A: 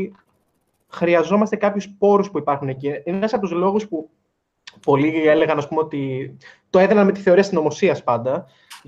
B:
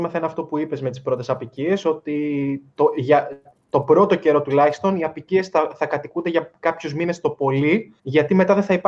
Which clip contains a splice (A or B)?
B